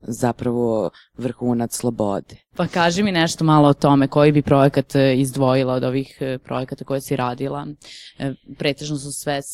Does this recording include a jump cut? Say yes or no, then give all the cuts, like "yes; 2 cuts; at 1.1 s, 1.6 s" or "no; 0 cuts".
yes; 1 cut; at 2.5 s